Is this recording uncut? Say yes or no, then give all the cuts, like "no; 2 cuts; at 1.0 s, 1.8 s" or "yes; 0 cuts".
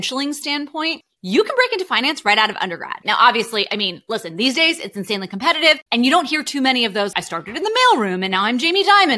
no; 2 cuts; at 3.0 s, 7.1 s